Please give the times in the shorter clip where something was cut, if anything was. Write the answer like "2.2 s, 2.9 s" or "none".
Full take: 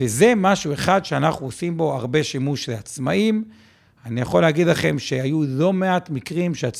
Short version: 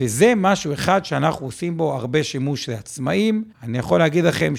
3.5 s